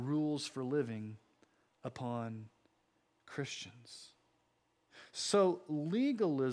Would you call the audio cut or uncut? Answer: uncut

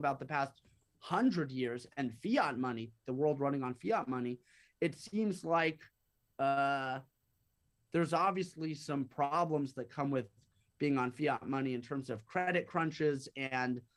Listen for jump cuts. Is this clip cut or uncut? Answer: uncut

